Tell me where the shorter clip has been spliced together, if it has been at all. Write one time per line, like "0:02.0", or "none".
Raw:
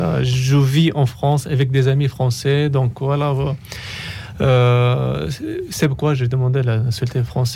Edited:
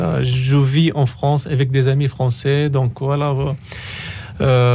none